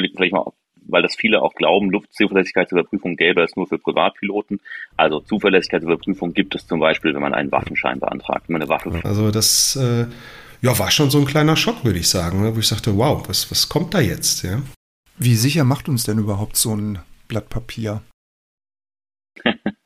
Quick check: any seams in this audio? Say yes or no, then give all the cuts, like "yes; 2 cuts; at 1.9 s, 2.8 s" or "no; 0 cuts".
yes; 1 cut; at 9.0 s